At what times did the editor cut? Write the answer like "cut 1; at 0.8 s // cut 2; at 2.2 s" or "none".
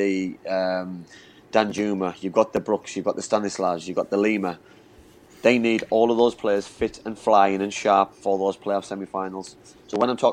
none